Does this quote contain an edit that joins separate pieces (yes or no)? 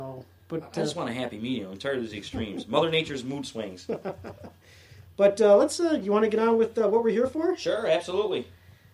no